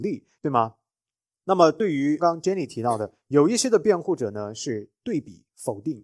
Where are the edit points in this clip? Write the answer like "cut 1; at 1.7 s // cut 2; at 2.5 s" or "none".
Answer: cut 1; at 2.2 s

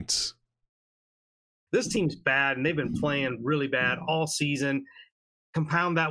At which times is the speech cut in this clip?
cut 1; at 1.7 s

